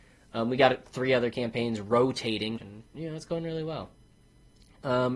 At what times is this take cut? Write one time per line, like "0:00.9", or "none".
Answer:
0:02.6